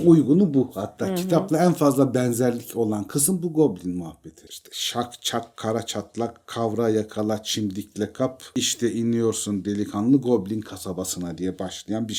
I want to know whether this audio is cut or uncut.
cut